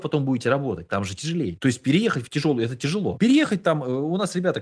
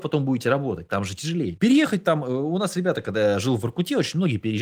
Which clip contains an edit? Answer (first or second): second